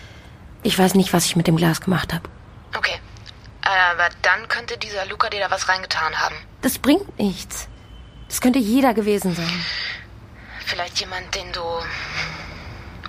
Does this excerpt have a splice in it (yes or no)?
yes